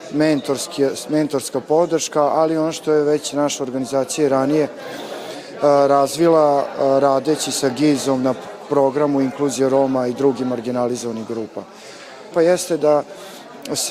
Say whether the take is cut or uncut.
cut